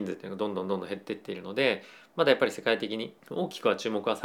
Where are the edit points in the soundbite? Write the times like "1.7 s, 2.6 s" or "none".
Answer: 3.2 s